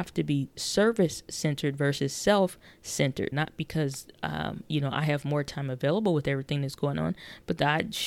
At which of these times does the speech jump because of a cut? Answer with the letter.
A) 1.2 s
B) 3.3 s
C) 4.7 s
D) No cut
B